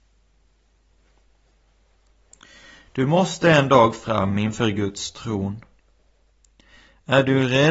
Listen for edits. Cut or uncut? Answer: uncut